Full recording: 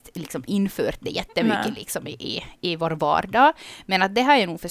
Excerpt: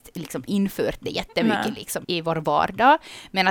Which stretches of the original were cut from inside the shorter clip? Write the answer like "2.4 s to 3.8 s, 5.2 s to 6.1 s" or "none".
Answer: 2.0 s to 2.6 s

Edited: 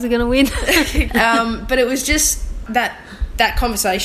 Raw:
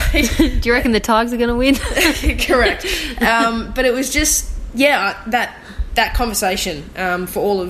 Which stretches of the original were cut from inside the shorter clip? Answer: 2.4 s to 3.1 s, 4.7 s to 5.2 s

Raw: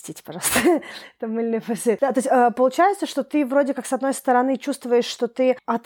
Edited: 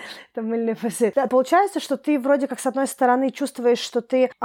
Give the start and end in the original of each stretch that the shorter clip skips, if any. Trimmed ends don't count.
2.1 s to 2.5 s

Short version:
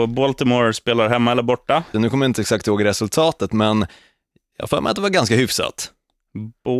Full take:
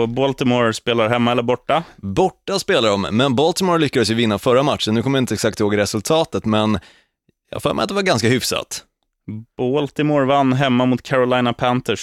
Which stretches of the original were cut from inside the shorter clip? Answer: 1.9 s to 4.9 s

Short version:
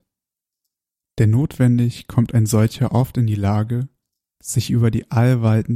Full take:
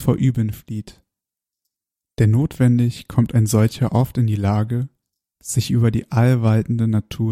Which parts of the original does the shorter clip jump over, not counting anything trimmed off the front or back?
none

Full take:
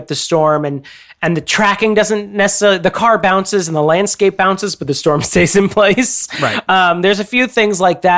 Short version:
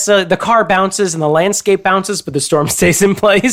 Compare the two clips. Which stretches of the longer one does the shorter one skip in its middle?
none

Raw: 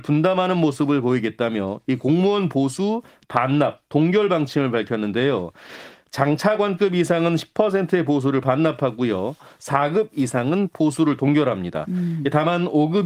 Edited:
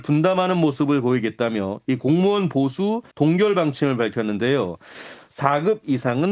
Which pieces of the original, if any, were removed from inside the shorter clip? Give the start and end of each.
3.1 s to 3.9 s, 5.9 s to 9.5 s

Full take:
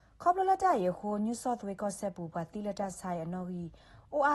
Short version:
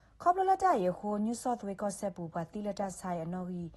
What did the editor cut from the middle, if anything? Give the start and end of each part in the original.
none

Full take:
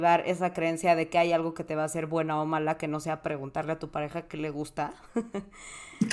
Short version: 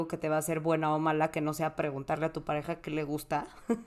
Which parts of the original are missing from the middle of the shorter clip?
none

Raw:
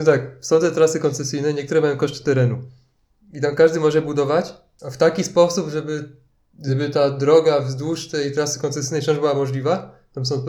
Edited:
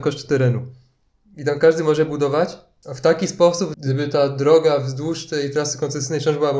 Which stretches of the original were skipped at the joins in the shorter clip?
5.7 s to 6.5 s

